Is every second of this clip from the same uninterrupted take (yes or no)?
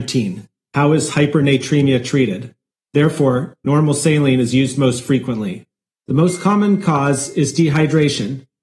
no